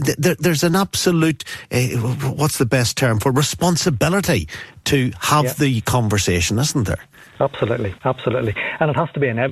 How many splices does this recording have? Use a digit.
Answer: 1